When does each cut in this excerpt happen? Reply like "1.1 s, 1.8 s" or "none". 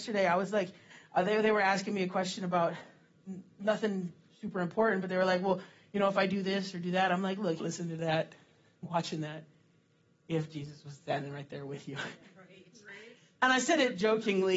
7.6 s